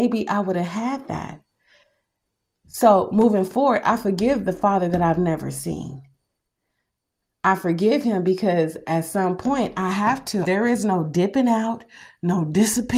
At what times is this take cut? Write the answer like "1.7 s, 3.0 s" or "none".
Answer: 10.4 s